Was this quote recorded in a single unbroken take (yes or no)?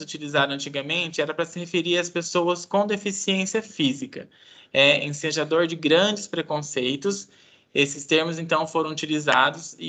yes